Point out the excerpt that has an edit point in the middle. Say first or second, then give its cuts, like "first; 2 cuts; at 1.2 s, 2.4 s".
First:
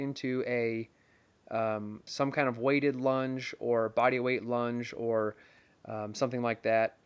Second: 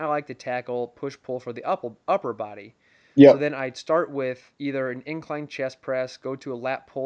first; 1 cut; at 2.1 s